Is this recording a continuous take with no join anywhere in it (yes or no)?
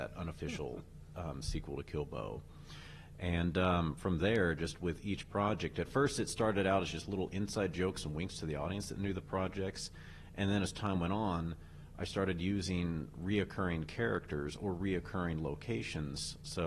yes